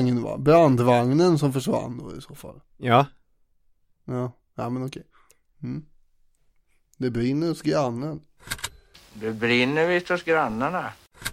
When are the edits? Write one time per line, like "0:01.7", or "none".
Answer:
none